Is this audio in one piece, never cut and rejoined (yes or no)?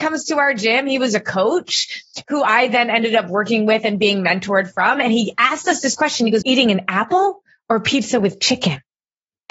no